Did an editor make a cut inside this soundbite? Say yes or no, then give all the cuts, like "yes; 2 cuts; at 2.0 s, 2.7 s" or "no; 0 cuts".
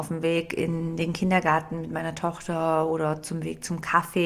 no; 0 cuts